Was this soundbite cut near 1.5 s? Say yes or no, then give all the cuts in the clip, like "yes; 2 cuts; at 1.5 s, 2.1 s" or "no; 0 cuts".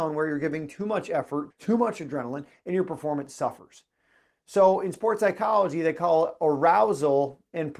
yes; 1 cut; at 1.5 s